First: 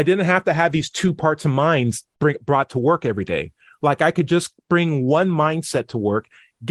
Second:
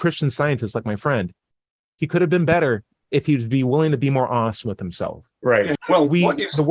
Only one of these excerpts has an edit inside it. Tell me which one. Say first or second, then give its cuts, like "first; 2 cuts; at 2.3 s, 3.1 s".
second; 2 cuts; at 2.0 s, 5.8 s